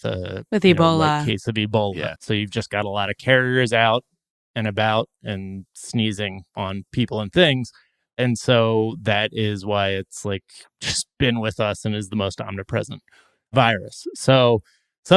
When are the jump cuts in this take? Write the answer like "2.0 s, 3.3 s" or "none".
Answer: 2.2 s